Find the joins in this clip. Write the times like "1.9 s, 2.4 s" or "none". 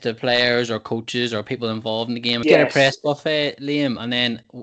2.4 s